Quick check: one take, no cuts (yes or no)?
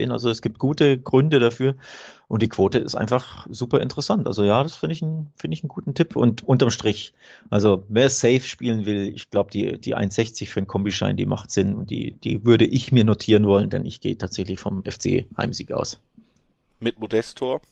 yes